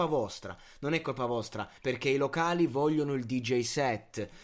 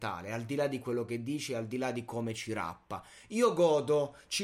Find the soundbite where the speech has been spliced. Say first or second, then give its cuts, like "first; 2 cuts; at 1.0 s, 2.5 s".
first; 1 cut; at 1.8 s